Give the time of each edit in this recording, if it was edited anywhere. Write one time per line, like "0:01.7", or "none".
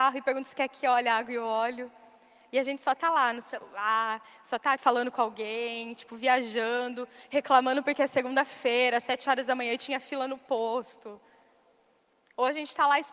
0:04.8